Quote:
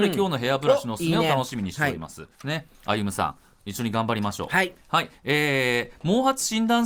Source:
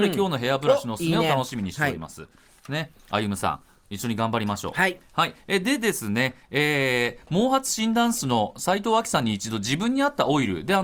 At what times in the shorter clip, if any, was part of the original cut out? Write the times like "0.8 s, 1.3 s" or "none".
2.3 s, 5.2 s